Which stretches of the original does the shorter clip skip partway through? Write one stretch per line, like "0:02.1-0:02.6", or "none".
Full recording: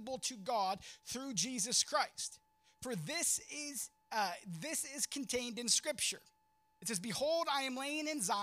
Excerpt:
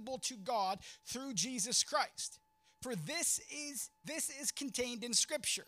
0:04.0-0:04.6

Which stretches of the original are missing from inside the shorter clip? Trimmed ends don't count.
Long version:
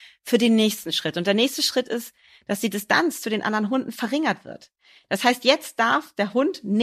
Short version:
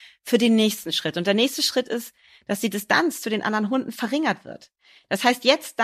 none

